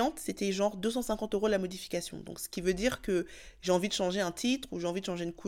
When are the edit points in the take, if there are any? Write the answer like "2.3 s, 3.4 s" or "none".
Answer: none